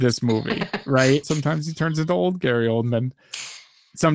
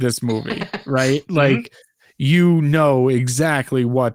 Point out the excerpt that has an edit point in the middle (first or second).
first